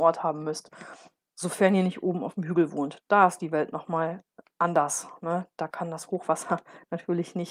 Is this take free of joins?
no; 1 cut; at 1.2 s

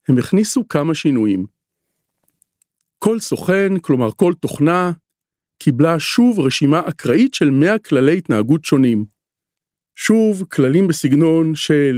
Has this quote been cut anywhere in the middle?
no; 0 cuts

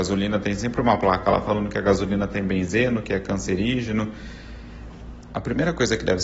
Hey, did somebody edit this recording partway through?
yes; 1 cut; at 5.3 s

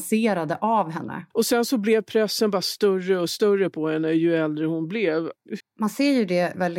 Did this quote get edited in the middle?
yes; 2 cuts; at 1.3 s, 5.6 s

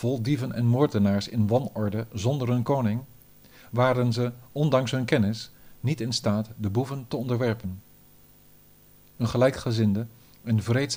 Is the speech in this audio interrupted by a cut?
no; 0 cuts

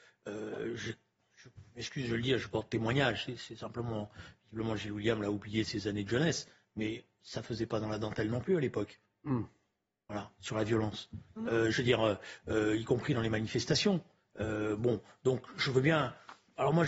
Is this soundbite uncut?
yes; 0 cuts

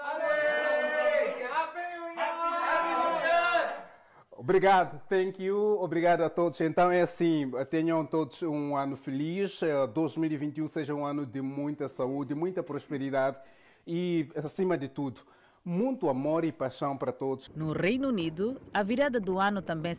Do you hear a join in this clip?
no; 0 cuts

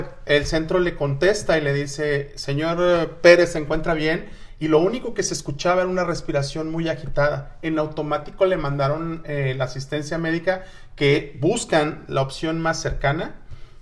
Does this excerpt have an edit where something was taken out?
no; 0 cuts

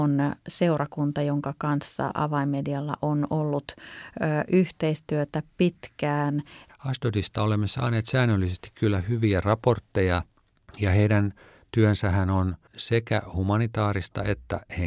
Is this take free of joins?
no; 1 cut; at 6.7 s

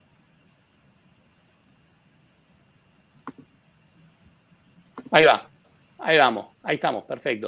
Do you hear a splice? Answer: yes; 1 cut; at 6.5 s

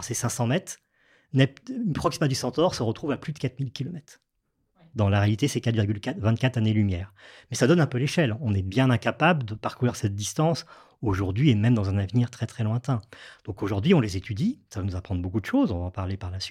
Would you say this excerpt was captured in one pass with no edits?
yes; 0 cuts

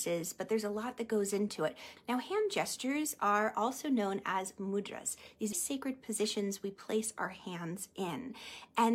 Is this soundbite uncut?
no; 2 cuts; at 2.0 s, 5.5 s

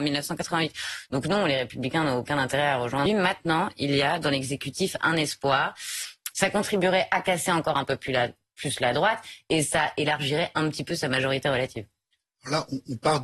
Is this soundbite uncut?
no; 2 cuts; at 3.1 s, 6.3 s

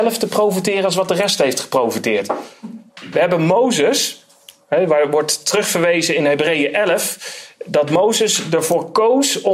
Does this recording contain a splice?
no; 0 cuts

